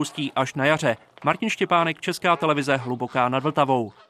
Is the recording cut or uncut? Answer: uncut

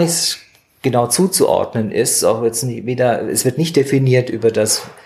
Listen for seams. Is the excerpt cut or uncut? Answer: uncut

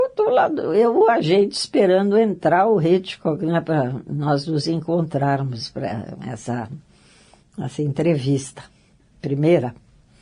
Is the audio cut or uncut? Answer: uncut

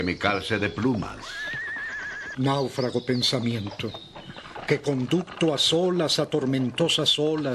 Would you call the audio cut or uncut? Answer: cut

